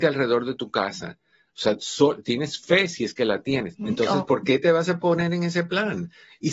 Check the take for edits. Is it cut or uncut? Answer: cut